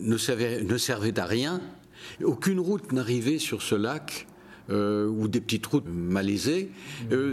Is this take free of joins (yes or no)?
no